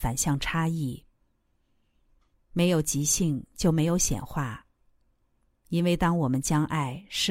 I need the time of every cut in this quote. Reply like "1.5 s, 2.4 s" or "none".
none